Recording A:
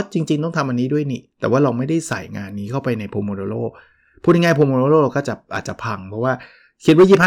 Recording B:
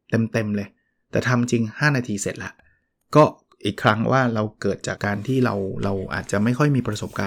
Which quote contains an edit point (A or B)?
B